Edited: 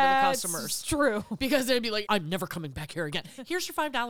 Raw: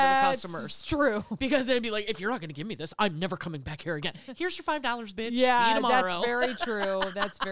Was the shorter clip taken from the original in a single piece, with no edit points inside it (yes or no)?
no